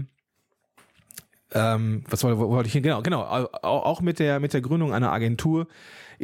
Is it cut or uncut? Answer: uncut